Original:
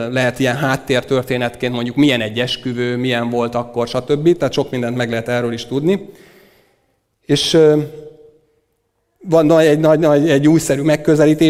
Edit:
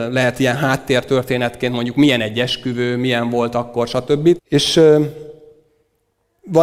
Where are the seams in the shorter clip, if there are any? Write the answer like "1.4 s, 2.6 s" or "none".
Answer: 4.4 s

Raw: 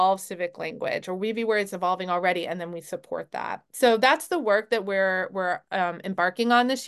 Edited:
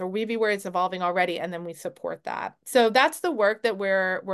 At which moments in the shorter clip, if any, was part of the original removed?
none

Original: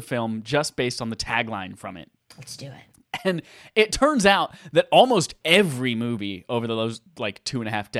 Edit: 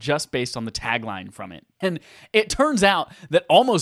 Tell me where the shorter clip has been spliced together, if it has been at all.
1.8 s

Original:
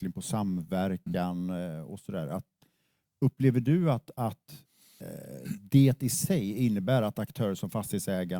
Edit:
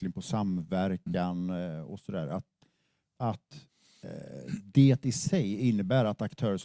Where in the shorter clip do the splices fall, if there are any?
3.2 s

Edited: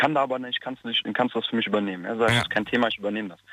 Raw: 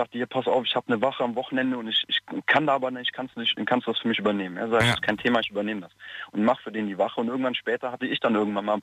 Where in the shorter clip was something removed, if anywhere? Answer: none

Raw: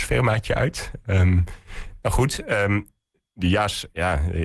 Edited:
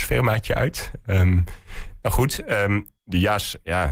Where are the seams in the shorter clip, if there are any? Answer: 3.0 s

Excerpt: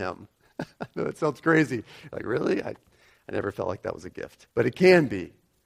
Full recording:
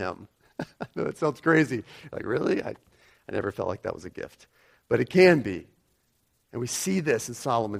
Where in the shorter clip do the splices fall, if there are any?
4.5 s

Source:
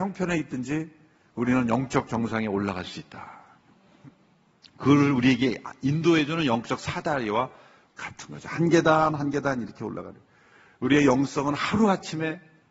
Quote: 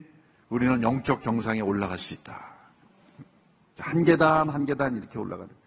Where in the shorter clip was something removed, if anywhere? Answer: 3.8 s

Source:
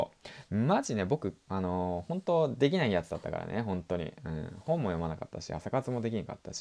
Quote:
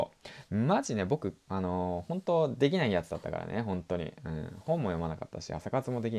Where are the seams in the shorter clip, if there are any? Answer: none

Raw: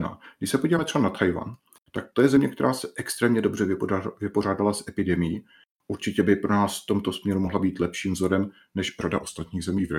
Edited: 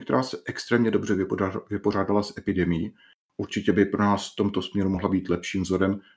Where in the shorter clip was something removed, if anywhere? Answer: none

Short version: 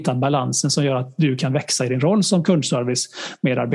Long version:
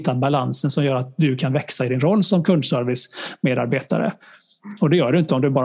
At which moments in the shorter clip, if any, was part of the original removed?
none

